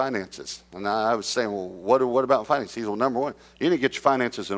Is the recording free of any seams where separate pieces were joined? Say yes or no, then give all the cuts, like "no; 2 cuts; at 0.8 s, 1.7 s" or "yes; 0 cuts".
yes; 0 cuts